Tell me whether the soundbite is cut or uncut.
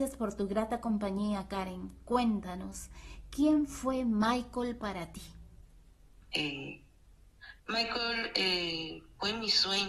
cut